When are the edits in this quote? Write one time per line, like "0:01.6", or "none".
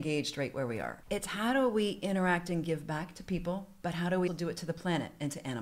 0:01.0
0:04.3